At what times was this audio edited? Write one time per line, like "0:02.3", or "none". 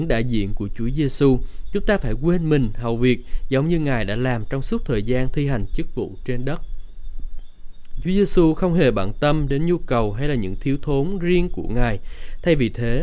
none